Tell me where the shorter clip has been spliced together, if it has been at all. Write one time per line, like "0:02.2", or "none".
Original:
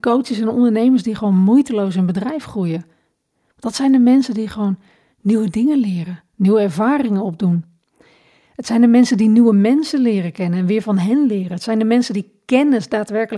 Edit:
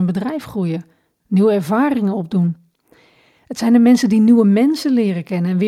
0:01.2

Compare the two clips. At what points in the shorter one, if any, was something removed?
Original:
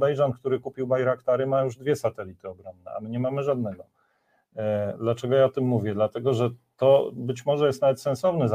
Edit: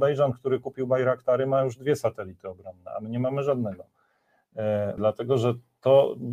0:05.0

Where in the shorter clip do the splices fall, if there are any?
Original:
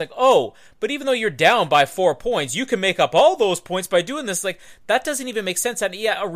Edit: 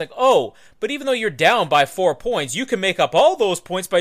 none

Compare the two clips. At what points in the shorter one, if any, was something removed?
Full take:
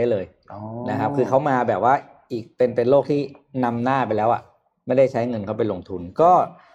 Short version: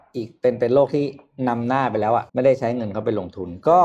0:02.3

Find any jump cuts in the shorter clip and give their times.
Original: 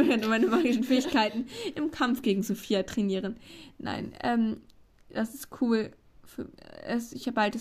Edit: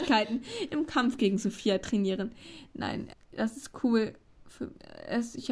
0:03.1

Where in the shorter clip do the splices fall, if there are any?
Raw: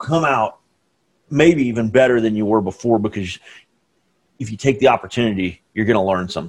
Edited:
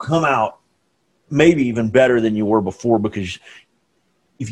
none

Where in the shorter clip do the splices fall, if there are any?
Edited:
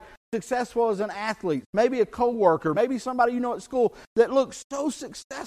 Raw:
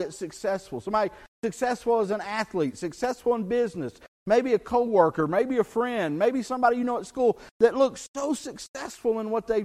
0:01.6
0:02.7

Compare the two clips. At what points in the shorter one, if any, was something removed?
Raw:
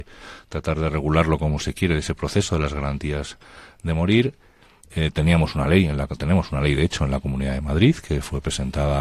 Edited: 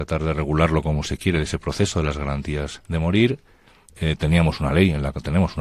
0:02.8

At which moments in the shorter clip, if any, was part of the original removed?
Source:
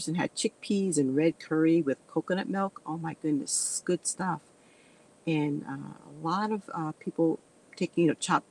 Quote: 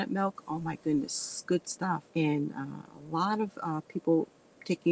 0:02.1

